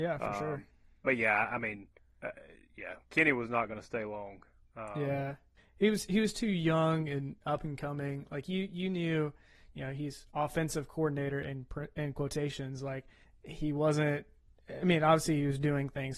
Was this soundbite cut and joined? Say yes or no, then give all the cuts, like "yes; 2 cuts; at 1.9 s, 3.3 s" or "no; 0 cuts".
no; 0 cuts